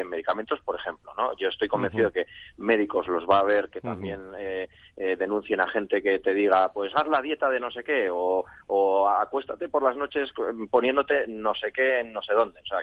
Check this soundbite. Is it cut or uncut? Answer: uncut